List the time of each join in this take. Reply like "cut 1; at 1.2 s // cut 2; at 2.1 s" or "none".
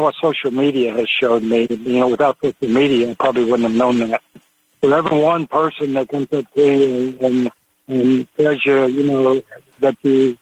cut 1; at 4.7 s